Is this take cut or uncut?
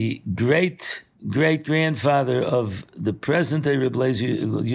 cut